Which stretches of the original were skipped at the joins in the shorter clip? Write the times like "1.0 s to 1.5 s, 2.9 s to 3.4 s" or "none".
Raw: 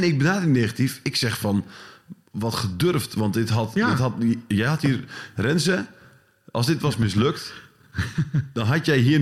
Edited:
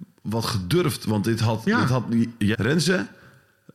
4.6 s to 5.3 s